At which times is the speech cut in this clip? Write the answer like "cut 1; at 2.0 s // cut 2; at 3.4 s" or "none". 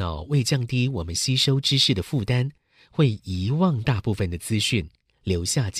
none